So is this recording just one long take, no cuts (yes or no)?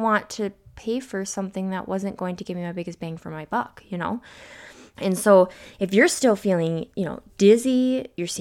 no